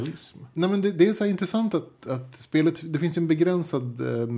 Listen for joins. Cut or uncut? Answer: uncut